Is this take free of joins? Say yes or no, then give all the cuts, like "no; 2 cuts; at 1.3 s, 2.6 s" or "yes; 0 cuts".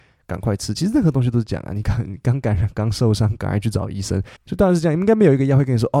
no; 2 cuts; at 1.8 s, 4.4 s